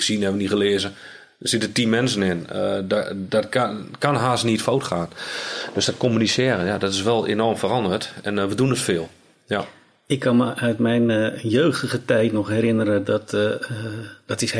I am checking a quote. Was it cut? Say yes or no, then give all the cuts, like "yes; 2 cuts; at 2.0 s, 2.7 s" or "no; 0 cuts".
no; 0 cuts